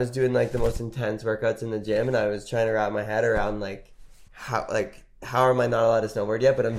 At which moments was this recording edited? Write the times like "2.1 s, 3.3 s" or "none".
4.3 s